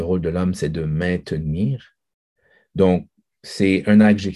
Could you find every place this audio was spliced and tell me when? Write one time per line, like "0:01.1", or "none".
none